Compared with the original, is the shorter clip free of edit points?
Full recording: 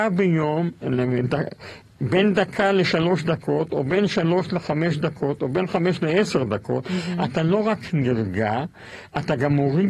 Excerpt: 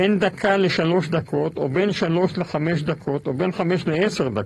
yes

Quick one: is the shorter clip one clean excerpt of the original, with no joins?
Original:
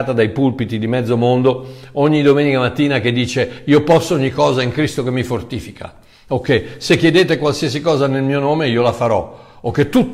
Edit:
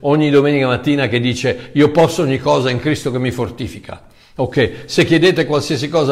yes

